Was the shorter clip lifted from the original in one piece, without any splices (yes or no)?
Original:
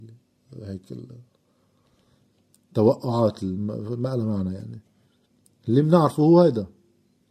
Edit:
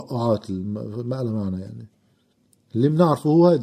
yes